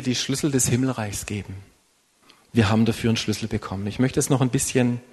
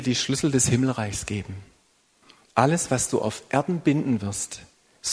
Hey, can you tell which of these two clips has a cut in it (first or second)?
first